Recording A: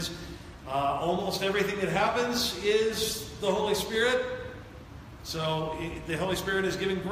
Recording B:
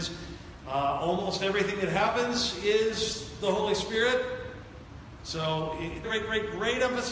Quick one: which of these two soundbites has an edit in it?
B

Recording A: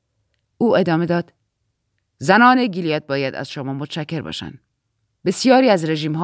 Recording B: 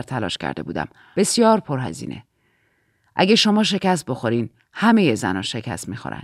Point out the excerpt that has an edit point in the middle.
B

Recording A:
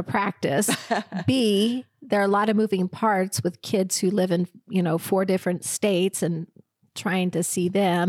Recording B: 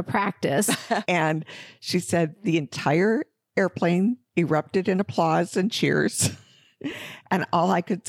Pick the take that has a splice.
B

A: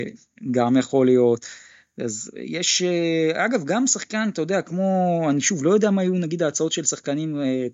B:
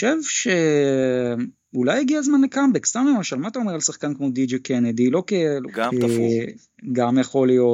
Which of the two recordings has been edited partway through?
B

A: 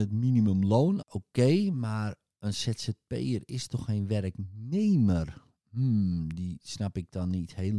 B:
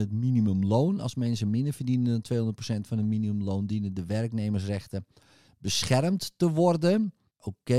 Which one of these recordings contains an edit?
A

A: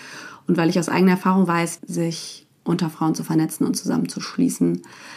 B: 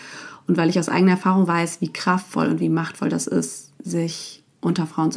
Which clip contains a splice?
A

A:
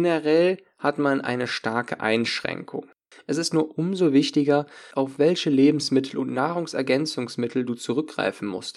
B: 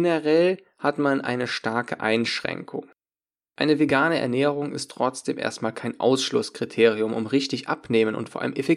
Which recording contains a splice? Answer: A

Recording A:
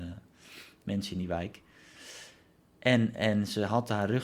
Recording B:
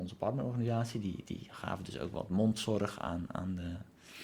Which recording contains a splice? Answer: B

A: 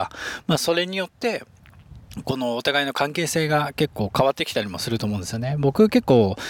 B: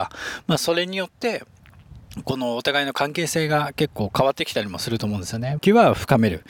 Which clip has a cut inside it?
B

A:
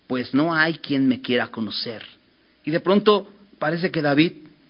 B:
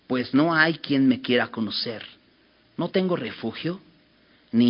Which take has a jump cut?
A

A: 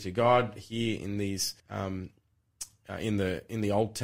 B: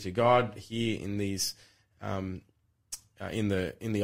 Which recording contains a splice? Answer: A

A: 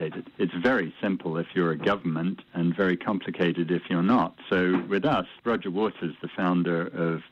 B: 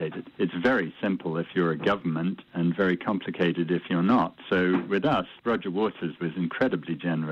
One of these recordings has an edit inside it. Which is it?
B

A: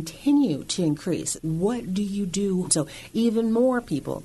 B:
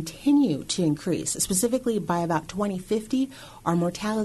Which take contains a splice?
A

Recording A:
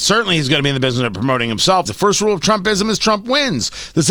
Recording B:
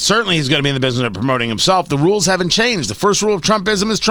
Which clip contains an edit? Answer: A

